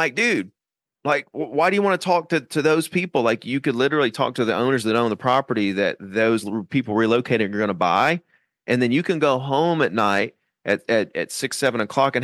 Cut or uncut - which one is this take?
uncut